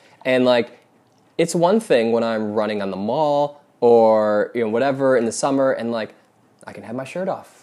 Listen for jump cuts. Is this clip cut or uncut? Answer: uncut